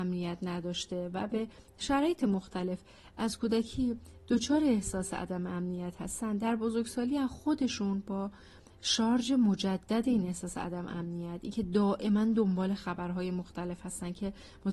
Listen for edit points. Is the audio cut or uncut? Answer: uncut